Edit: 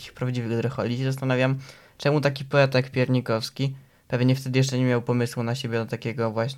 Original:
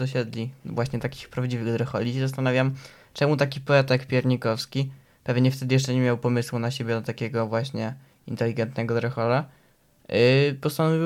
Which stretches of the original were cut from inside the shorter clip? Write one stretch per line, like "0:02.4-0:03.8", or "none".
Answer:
none